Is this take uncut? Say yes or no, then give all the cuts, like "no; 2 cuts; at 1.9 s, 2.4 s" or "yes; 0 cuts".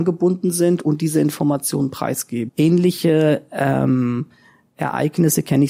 no; 1 cut; at 2.5 s